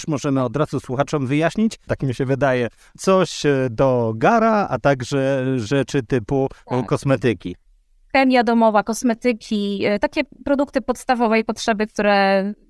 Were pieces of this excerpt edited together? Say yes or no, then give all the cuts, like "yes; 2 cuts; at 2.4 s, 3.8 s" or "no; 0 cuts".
yes; 1 cut; at 1.9 s